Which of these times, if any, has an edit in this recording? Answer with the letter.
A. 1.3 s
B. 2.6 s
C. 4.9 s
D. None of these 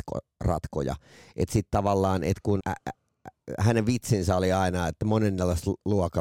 B